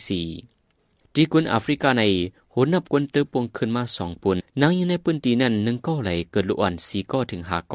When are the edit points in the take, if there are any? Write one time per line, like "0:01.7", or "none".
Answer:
0:04.4